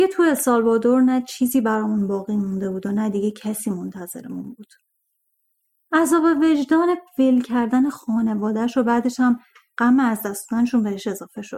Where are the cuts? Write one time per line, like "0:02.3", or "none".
0:05.7